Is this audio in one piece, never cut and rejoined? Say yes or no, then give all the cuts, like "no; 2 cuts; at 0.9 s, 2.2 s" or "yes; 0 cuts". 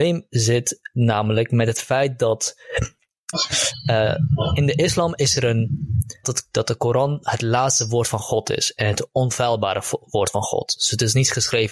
no; 2 cuts; at 3.3 s, 6.2 s